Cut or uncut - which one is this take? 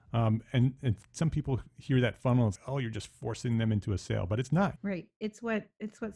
cut